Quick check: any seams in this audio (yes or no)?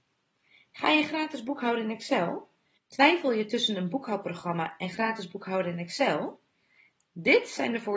yes